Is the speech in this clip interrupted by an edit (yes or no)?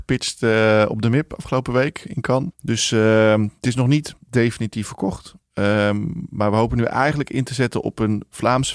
yes